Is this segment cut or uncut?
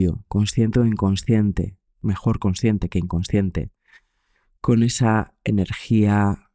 cut